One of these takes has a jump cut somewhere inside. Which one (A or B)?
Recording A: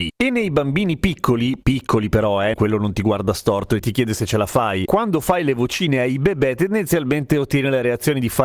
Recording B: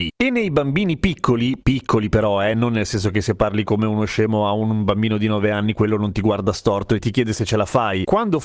A